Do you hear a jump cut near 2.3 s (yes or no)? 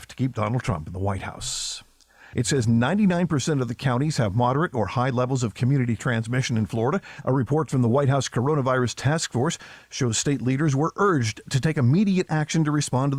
yes